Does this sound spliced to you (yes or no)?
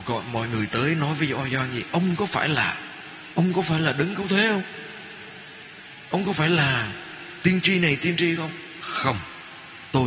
no